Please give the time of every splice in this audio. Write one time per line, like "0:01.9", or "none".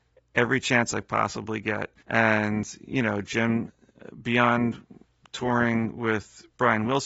0:02.0